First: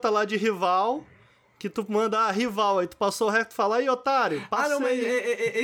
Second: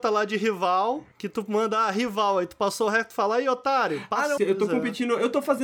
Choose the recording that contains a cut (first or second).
second